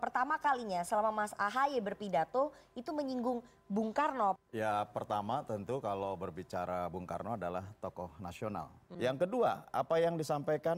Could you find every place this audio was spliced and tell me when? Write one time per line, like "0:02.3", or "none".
0:04.4
0:08.9